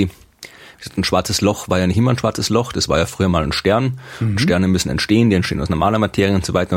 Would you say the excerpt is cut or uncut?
uncut